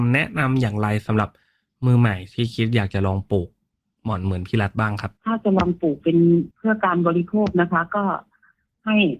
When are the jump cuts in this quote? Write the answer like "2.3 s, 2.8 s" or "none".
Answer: 5.2 s, 6.5 s